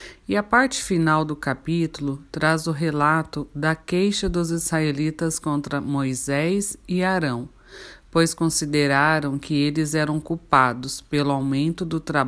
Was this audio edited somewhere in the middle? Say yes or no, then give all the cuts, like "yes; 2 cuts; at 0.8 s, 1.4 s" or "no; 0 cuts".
no; 0 cuts